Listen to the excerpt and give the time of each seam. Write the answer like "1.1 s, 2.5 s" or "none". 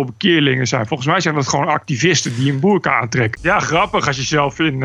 3.4 s